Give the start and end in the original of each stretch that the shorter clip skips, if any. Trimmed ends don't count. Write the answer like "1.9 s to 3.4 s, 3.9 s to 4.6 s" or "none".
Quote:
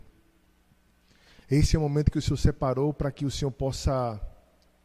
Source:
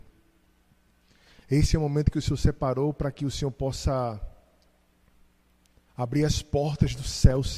none